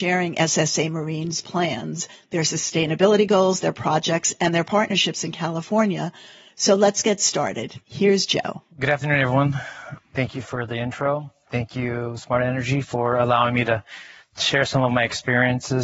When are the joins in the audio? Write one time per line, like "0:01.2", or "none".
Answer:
0:08.7